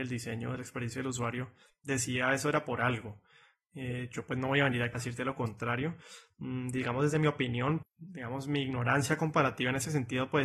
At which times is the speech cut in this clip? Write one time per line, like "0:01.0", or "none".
0:04.9
0:07.8